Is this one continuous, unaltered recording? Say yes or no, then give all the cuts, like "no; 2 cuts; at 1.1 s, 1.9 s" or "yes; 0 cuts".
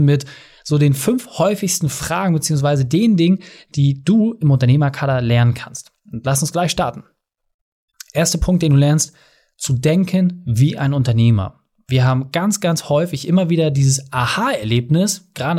yes; 0 cuts